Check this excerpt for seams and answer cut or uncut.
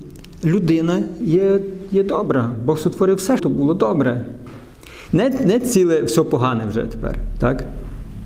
cut